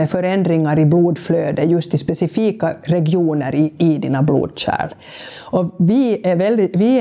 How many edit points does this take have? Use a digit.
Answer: 1